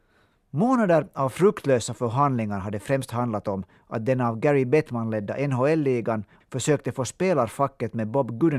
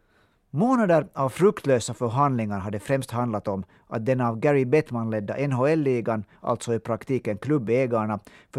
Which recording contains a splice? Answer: first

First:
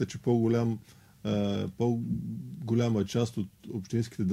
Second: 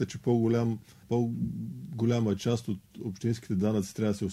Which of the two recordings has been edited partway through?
second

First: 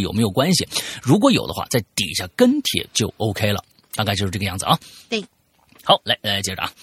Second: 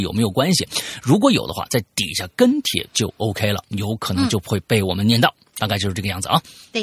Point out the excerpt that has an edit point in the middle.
first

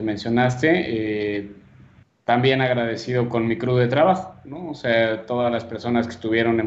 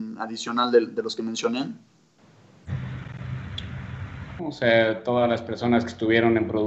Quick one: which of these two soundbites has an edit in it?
second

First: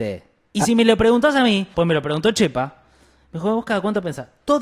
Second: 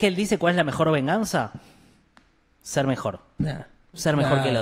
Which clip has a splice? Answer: first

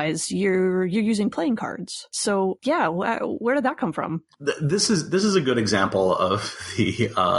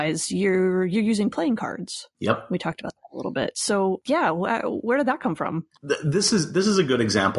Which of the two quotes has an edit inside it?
first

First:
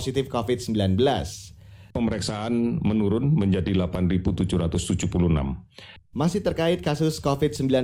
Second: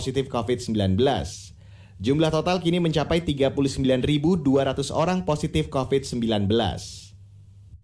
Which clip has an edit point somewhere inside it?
first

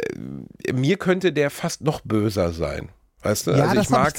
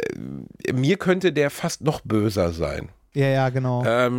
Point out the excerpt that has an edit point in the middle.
second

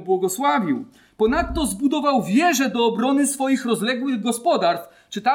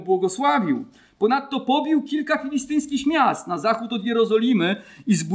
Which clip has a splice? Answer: second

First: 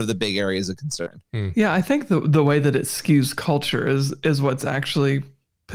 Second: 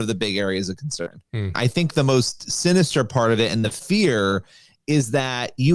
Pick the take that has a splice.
second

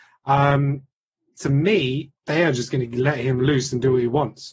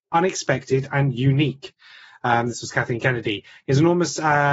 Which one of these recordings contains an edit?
first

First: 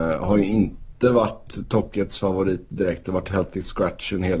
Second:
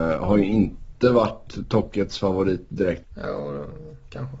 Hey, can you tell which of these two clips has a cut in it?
second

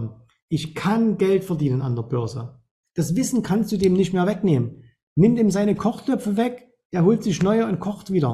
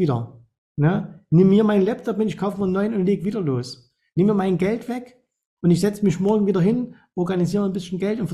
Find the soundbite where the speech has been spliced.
first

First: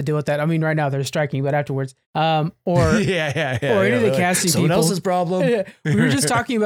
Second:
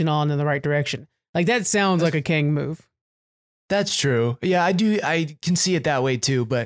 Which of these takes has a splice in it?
first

